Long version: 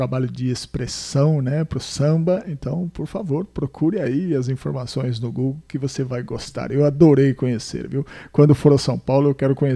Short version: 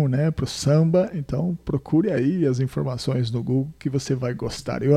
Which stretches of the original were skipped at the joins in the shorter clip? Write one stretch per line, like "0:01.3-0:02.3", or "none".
0:02.9-0:03.5